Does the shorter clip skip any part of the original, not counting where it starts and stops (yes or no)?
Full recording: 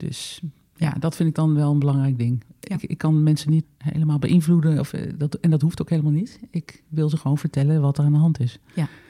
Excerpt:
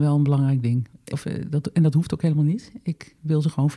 yes